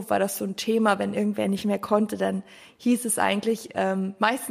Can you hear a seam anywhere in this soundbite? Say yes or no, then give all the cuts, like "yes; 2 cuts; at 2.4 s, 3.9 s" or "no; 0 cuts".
no; 0 cuts